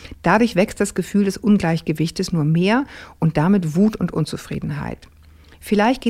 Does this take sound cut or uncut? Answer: uncut